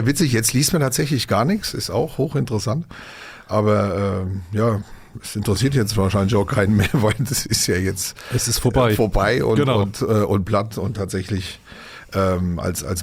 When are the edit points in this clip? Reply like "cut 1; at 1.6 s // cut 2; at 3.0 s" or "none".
none